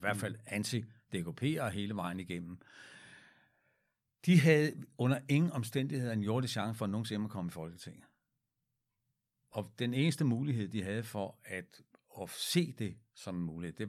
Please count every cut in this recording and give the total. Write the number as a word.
one